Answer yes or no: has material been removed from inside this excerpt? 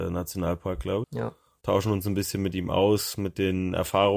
yes